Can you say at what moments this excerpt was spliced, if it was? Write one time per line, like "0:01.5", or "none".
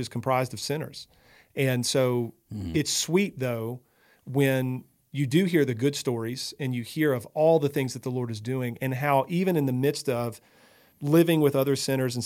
none